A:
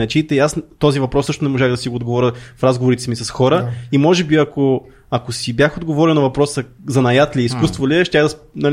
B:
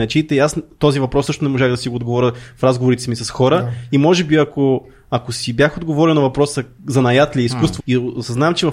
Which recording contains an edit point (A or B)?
B